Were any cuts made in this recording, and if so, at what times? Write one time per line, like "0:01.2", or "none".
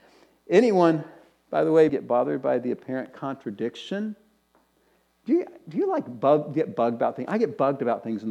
0:01.9